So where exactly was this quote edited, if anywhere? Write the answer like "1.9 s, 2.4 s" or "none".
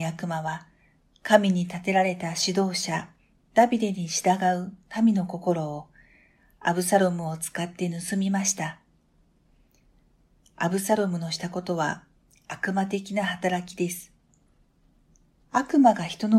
15.4 s